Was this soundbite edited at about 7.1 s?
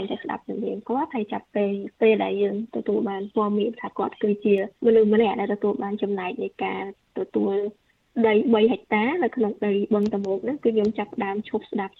no; 1 cut; at 4.8 s

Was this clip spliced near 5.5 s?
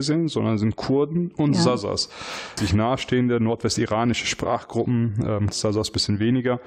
yes; 2 cuts; at 2.6 s, 5.5 s

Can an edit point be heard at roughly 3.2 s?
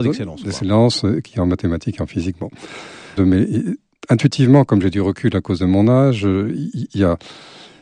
yes; 1 cut; at 3.2 s

